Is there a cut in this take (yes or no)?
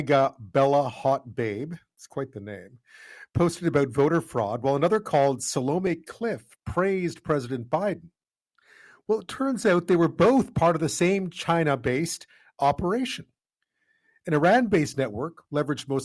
no